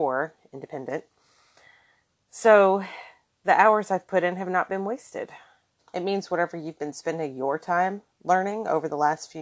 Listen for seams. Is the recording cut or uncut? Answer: cut